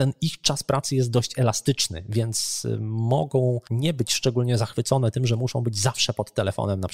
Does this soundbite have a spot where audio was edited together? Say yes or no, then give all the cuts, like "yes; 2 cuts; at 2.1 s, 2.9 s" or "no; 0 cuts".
yes; 1 cut; at 3.6 s